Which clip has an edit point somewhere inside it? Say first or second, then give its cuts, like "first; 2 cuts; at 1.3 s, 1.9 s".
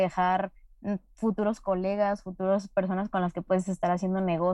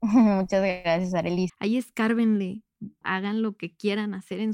second; 2 cuts; at 1.5 s, 3.0 s